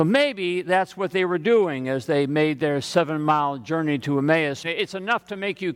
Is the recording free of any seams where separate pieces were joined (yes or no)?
no